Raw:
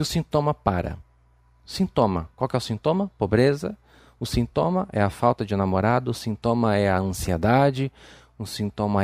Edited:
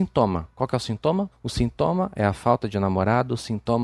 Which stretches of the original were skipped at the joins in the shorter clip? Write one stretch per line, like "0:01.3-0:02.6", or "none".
0:03.1-0:04.1